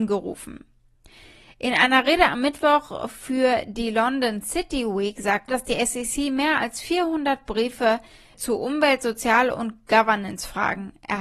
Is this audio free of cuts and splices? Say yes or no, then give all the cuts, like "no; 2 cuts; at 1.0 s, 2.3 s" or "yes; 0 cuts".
no; 2 cuts; at 5.5 s, 8.3 s